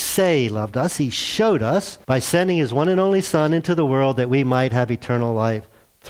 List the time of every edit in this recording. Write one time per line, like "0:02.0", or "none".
0:02.0